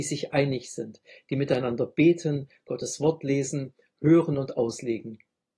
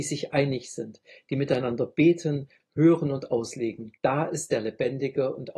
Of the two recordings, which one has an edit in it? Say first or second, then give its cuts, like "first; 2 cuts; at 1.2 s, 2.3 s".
second; 2 cuts; at 2.6 s, 4.0 s